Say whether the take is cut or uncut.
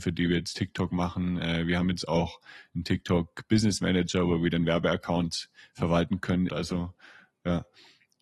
cut